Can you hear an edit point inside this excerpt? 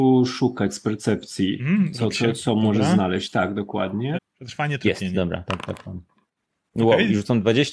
yes; 2 cuts; at 2.1 s, 4.1 s

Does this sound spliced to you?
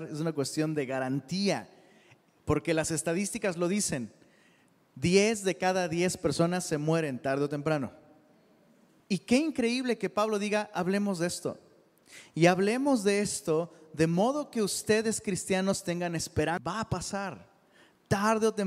yes; 1 cut; at 9.0 s

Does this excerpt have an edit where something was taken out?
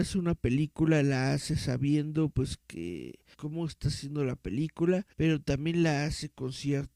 yes; 2 cuts; at 3.3 s, 5.1 s

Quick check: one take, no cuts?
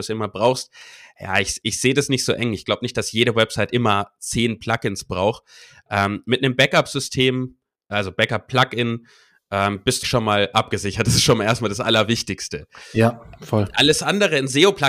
no; 1 cut; at 10.0 s

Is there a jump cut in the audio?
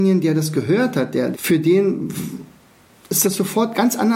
yes; 1 cut; at 1.3 s

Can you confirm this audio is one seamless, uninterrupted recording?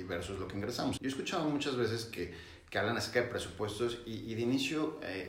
no; 1 cut; at 1.0 s

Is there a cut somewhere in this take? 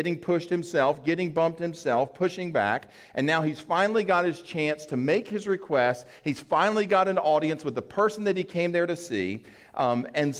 no; 0 cuts

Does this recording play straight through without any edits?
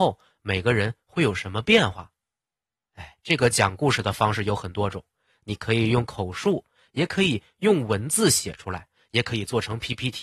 yes; 0 cuts

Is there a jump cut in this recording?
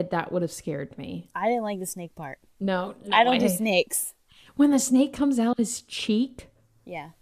no; 0 cuts

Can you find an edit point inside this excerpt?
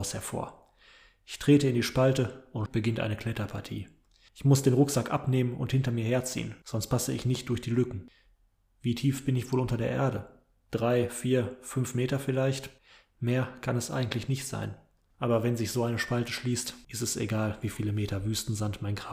yes; 1 cut; at 2.7 s

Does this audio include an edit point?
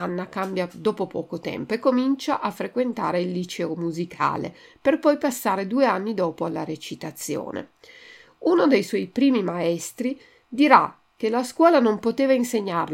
no; 0 cuts

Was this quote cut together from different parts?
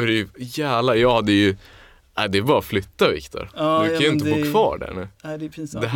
no; 0 cuts

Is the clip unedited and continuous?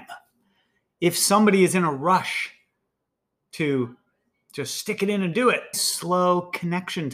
no; 1 cut; at 5.7 s

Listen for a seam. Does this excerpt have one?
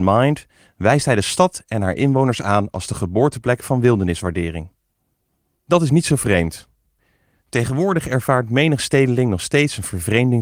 no; 0 cuts

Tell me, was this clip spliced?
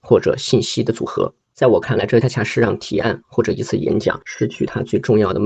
yes; 1 cut; at 2.2 s

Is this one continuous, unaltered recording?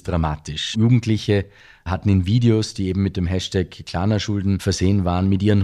yes; 0 cuts

